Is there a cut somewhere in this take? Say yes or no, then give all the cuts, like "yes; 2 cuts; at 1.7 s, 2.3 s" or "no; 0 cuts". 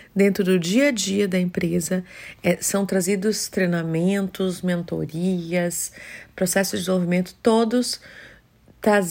no; 0 cuts